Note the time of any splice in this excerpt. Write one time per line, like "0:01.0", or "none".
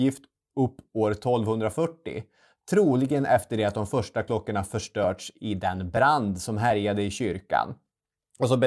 none